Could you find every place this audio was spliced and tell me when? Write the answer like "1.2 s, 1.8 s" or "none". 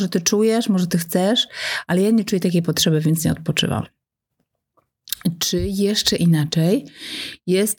none